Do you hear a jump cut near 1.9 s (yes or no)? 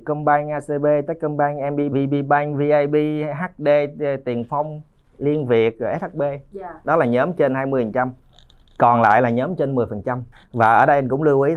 yes